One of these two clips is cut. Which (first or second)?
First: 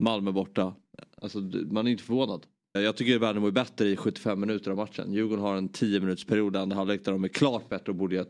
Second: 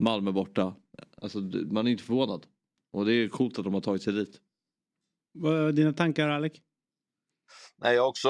first